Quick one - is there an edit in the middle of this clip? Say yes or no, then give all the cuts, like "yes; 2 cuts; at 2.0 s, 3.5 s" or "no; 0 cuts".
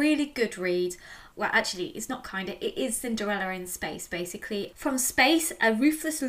yes; 2 cuts; at 1.3 s, 4.7 s